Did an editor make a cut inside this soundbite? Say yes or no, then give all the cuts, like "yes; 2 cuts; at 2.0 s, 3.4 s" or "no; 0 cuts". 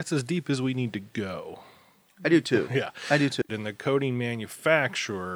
yes; 1 cut; at 3.5 s